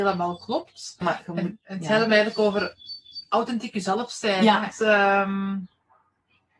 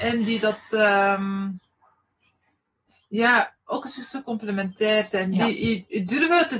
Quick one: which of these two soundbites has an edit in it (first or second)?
first